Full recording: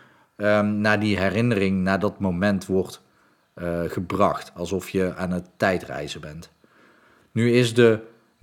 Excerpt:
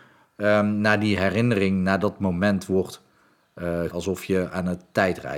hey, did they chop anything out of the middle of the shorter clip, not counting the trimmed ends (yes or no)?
yes